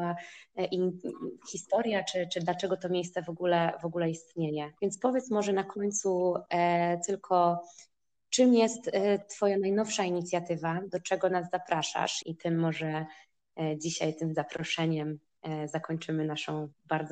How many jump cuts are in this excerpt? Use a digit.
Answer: 2